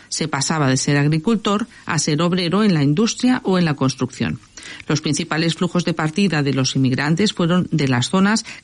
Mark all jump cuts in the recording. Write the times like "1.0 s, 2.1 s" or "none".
4.8 s

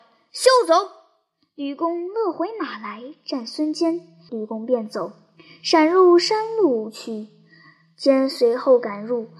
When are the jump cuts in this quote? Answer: 4.3 s

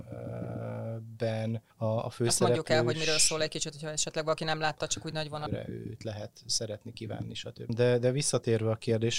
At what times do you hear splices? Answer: 1.7 s, 5.5 s, 7.7 s

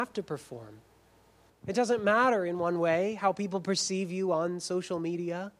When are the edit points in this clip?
1.5 s

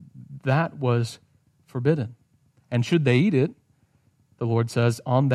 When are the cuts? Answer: none

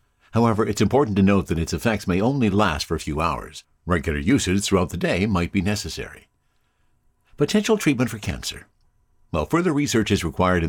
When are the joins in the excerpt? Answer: none

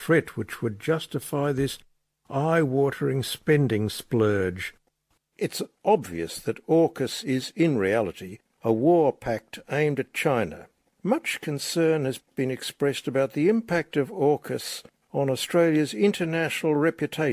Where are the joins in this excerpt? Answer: 5.2 s

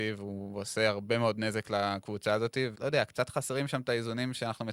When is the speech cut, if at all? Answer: 2.7 s

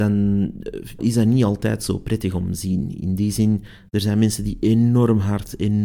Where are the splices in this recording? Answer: 1.0 s

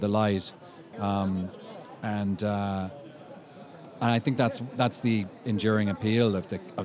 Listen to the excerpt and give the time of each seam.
0.9 s

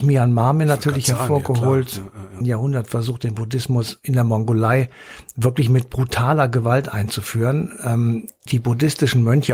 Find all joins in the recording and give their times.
2.4 s, 8.5 s

